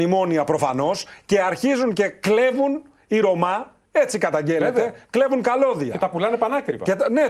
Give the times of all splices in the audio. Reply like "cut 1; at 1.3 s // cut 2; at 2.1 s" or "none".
none